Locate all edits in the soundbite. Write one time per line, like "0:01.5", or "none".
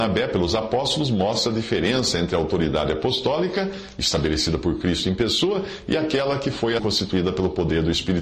0:06.8